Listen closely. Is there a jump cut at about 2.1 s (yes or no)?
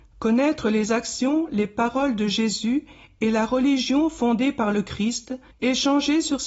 no